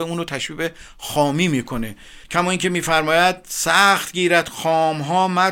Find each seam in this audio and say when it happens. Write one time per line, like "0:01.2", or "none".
0:02.2